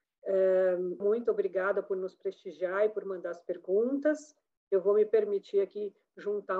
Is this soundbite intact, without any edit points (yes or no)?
no